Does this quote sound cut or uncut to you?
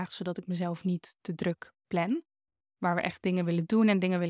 cut